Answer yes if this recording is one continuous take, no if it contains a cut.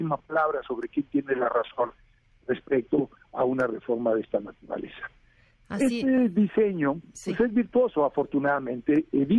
yes